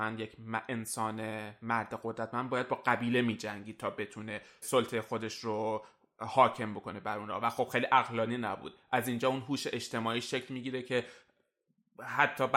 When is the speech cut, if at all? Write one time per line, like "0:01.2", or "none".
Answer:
none